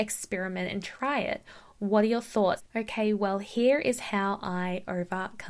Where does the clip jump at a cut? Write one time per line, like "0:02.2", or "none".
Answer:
0:02.6